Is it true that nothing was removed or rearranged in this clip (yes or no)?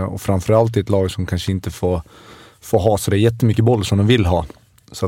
yes